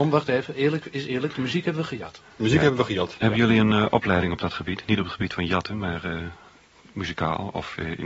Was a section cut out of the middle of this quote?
no; 0 cuts

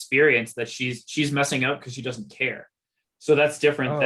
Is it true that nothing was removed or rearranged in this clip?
yes; 0 cuts

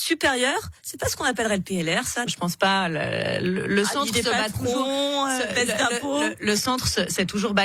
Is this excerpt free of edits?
no; 1 cut; at 2.3 s

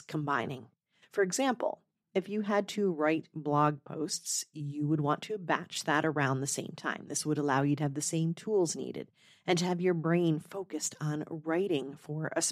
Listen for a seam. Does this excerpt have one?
no; 0 cuts

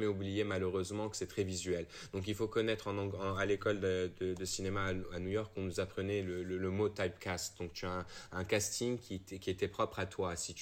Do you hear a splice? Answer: no; 0 cuts

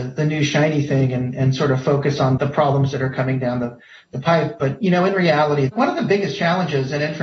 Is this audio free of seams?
no; 1 cut; at 2.4 s

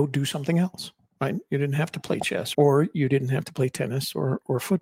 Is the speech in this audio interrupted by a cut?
yes; 1 cut; at 2.5 s

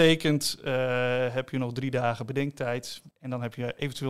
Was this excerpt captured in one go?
yes; 0 cuts

